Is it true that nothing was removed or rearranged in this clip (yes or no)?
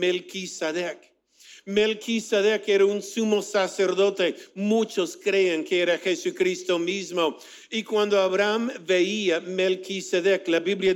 yes